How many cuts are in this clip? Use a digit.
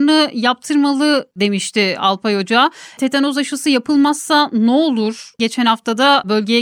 2